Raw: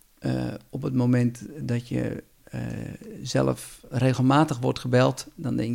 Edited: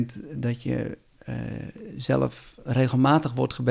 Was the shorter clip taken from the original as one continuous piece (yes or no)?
yes